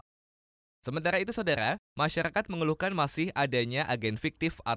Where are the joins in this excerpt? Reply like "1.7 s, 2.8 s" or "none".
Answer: none